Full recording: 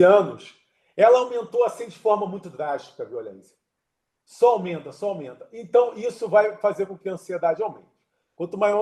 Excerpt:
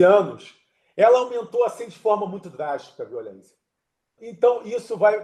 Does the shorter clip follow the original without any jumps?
no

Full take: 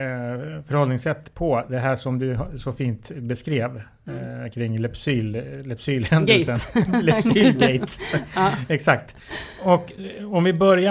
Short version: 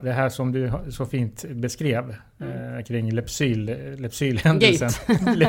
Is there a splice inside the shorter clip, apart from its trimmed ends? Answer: no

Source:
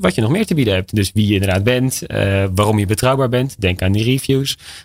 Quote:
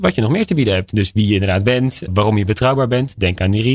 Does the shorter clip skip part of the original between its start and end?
yes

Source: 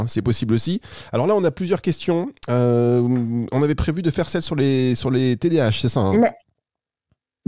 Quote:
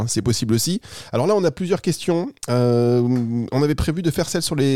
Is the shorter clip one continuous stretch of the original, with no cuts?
yes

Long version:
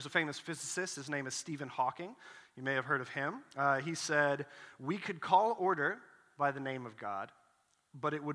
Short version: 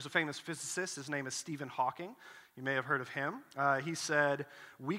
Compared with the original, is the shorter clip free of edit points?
yes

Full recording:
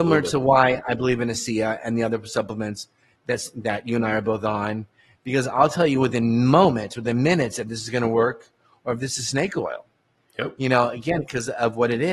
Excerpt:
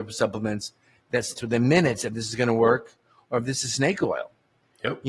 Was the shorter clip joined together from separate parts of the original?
yes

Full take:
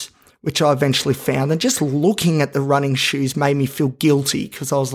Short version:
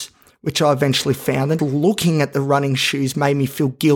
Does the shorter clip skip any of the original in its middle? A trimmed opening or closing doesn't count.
yes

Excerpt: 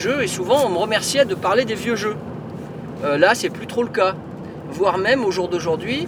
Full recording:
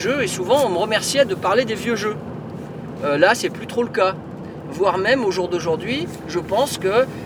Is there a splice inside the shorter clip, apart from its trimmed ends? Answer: no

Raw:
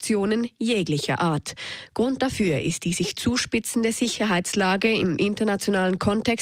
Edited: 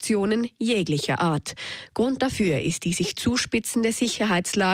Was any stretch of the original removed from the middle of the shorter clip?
no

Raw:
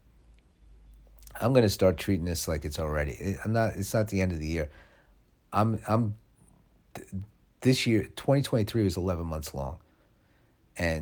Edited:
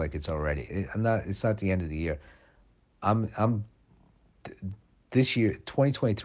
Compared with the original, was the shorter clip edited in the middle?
no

